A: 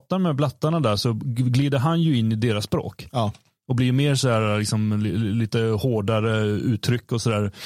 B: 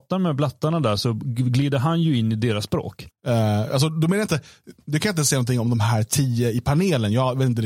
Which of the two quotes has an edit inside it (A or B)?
B